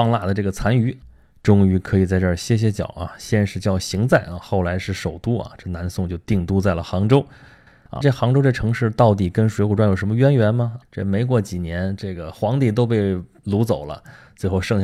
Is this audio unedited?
no; 3 cuts; at 8.0 s, 10.8 s, 12.0 s

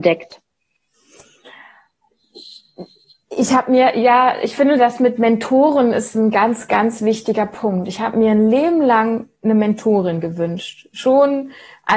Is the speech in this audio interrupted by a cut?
no; 0 cuts

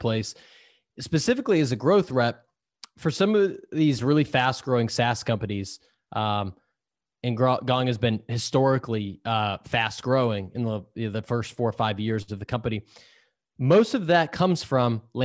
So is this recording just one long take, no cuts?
yes; 0 cuts

